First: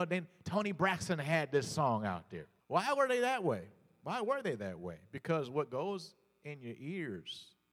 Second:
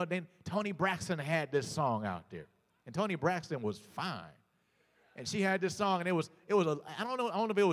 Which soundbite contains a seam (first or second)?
first